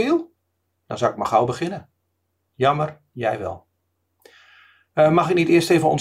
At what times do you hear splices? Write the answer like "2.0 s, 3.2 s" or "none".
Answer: 2.5 s